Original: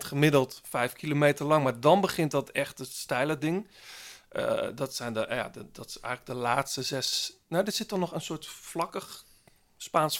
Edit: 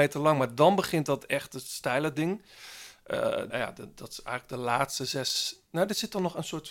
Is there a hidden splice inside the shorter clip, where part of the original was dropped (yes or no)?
yes